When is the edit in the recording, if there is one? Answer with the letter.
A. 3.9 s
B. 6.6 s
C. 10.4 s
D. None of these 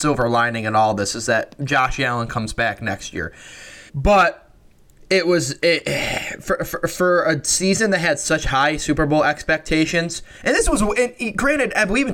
A